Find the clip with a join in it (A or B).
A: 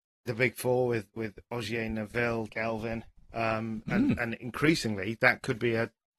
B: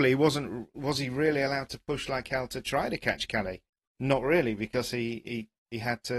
A